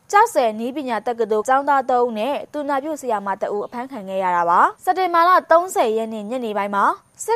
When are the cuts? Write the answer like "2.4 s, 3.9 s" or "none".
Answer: 1.4 s, 4.8 s